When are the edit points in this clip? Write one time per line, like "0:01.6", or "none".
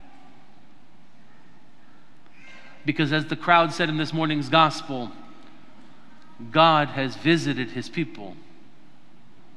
none